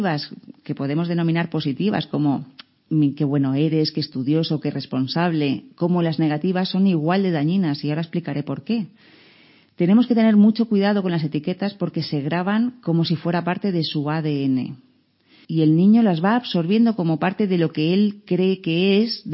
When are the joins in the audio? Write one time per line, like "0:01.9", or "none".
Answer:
0:15.4